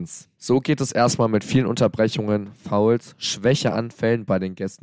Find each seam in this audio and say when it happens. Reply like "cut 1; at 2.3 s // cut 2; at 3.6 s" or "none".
none